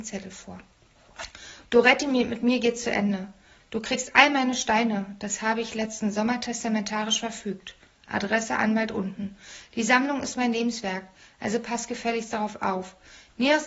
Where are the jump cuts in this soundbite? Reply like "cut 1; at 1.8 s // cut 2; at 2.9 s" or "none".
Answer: none